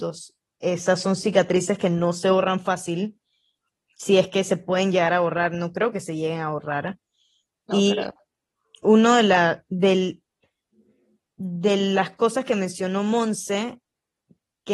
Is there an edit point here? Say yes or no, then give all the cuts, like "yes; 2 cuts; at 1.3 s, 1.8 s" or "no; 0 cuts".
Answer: no; 0 cuts